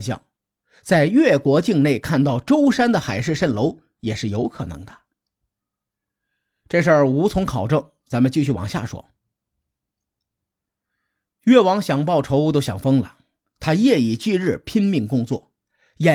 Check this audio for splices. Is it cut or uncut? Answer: uncut